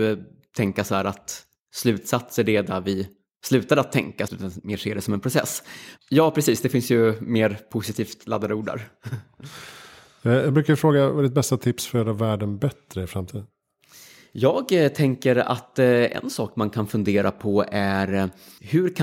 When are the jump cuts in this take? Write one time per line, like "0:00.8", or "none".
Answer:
0:04.3
0:06.0